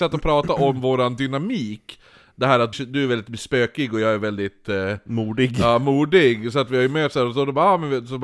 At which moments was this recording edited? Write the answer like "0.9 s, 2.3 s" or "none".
2.7 s